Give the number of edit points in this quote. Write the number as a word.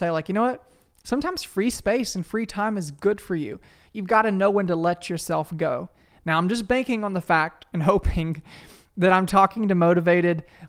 zero